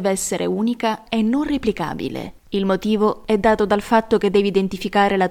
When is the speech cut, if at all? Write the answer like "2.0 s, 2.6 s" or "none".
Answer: none

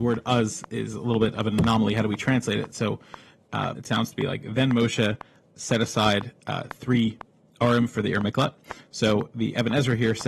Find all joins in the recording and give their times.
3.8 s

